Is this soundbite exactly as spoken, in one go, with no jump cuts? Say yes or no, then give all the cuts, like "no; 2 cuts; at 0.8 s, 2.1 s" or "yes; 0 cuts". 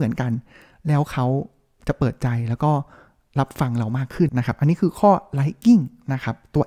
no; 1 cut; at 4.3 s